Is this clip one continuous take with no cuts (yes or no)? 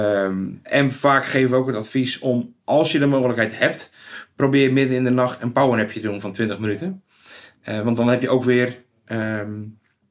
yes